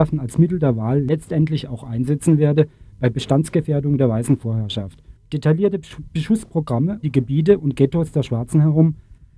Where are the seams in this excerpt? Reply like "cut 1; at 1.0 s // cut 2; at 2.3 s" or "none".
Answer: cut 1; at 5.2 s // cut 2; at 7.0 s